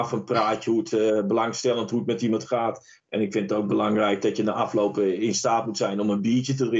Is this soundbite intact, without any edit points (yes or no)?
yes